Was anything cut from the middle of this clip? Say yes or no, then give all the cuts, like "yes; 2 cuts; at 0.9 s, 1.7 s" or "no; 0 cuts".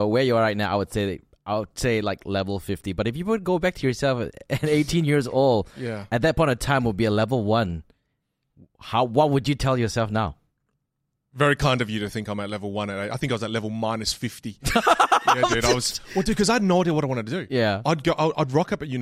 no; 0 cuts